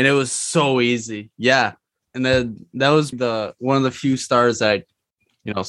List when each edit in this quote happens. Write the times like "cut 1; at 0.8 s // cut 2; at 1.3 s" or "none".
cut 1; at 2.1 s // cut 2; at 3.1 s